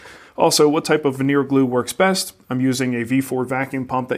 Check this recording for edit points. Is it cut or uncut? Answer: uncut